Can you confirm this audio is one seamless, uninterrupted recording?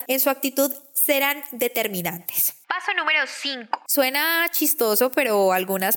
no; 1 cut; at 3.9 s

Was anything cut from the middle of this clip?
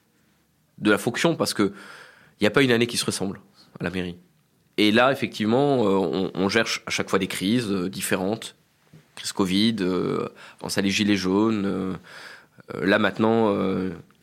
no; 0 cuts

